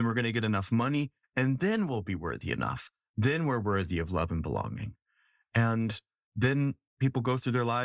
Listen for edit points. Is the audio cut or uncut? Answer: uncut